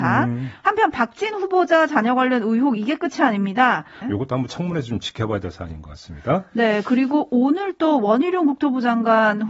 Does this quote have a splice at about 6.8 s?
no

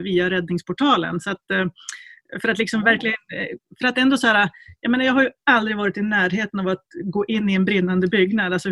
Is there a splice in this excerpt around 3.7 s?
no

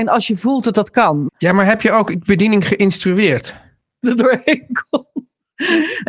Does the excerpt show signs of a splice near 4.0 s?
yes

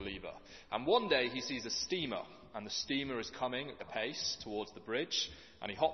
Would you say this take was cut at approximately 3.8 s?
yes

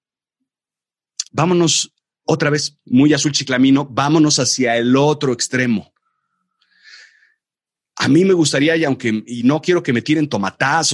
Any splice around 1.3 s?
yes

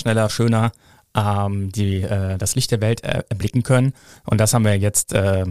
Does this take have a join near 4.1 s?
no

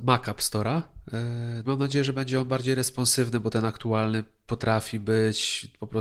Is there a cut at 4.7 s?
no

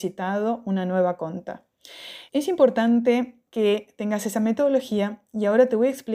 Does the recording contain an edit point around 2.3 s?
yes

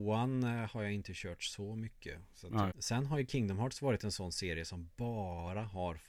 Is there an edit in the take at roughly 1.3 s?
no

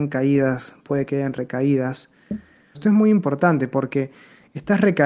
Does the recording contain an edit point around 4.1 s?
no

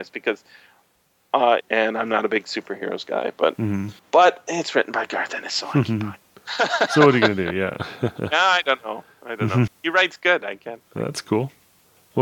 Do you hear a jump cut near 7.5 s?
no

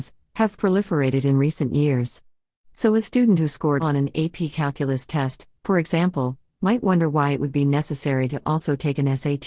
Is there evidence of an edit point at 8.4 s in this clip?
no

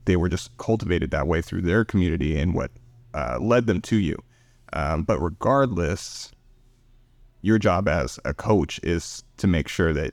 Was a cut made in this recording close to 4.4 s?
no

